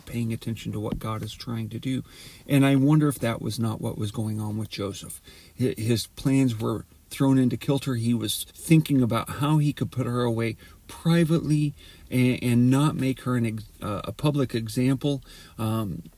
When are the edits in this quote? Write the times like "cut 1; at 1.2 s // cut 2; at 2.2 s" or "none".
cut 1; at 8.5 s